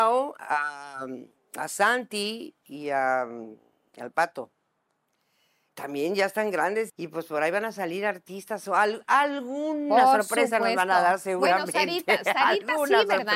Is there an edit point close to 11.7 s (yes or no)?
no